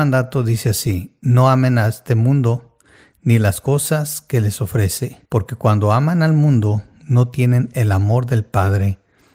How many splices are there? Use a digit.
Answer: 1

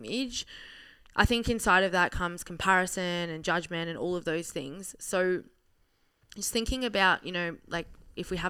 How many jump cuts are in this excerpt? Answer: 0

